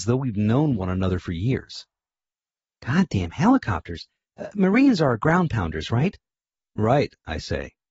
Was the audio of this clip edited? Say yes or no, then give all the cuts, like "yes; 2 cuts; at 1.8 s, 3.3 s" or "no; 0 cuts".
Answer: no; 0 cuts